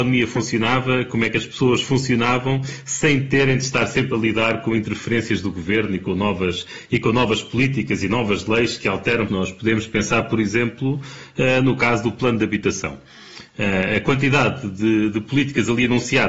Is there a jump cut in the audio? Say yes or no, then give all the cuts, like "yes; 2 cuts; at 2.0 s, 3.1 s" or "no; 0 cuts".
yes; 1 cut; at 9.3 s